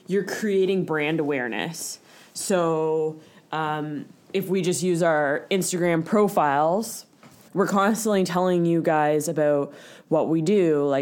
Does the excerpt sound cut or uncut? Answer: cut